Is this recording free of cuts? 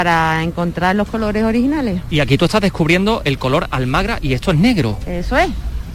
yes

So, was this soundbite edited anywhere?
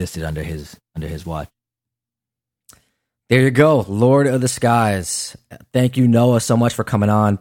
no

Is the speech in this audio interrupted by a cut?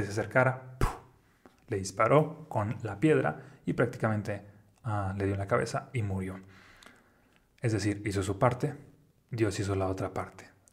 no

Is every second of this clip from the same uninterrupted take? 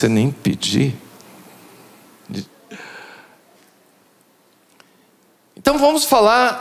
no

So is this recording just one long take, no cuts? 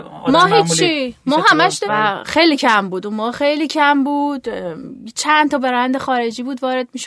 no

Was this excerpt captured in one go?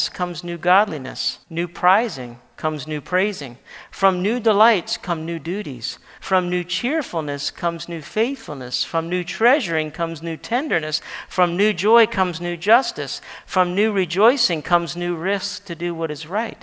no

